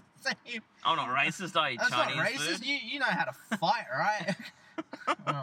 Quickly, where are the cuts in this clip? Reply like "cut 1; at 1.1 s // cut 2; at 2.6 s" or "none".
none